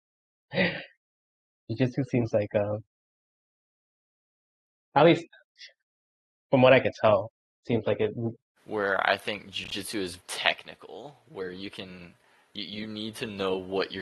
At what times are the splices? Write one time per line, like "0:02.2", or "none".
0:08.6
0:10.2